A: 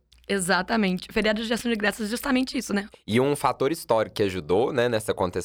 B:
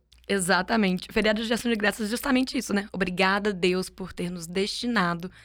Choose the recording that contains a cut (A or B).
A